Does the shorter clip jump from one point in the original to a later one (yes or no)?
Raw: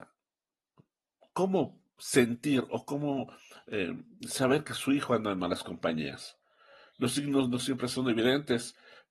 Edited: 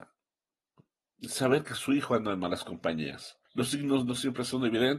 yes